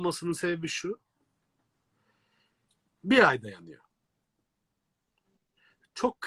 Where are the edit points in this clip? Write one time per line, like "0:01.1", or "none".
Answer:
0:02.9